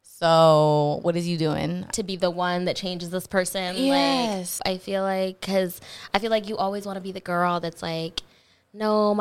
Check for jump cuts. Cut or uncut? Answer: cut